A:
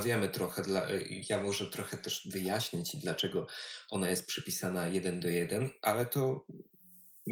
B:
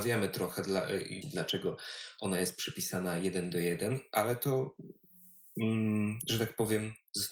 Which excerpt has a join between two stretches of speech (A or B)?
B